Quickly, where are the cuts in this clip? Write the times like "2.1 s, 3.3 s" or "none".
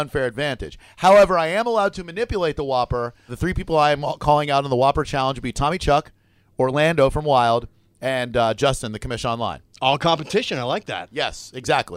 3.3 s